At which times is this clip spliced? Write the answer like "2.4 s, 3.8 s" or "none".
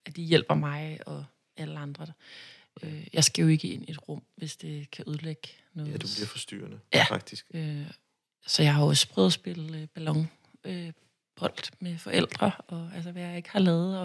7.5 s